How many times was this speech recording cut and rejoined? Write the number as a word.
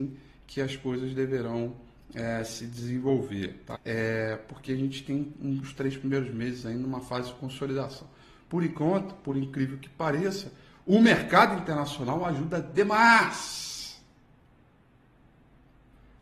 one